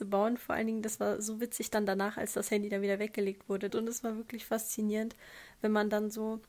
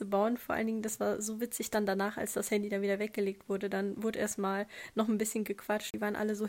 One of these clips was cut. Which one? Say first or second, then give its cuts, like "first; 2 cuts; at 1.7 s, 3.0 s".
first; 1 cut; at 3.7 s